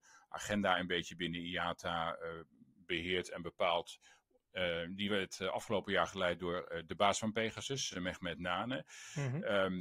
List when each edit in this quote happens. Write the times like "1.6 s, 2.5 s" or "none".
none